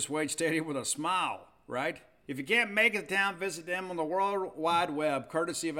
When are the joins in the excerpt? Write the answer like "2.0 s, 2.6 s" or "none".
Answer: 2.2 s